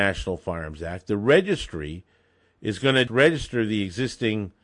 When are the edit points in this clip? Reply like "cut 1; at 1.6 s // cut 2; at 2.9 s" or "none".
cut 1; at 3.1 s